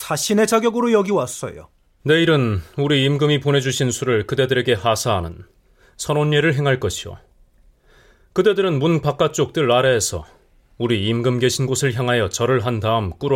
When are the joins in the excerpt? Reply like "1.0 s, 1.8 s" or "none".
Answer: 2.0 s